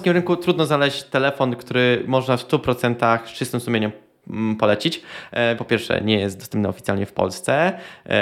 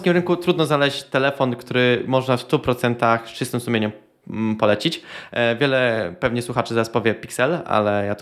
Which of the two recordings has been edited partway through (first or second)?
first